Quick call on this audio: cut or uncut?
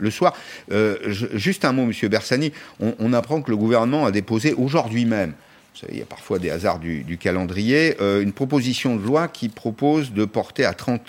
uncut